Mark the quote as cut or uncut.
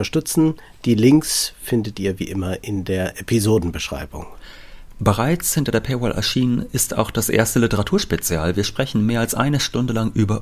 uncut